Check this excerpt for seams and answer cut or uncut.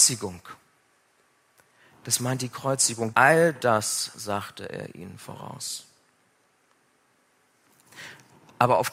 cut